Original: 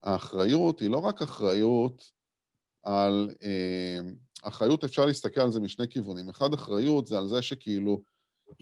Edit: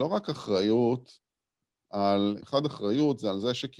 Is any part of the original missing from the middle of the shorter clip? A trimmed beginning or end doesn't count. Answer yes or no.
yes